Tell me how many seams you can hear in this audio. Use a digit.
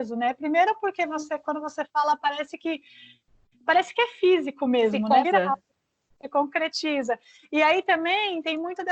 1